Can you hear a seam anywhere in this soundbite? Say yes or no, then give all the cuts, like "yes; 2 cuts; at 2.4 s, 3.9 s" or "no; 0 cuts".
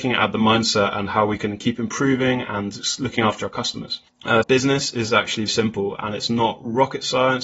yes; 2 cuts; at 4.4 s, 5.5 s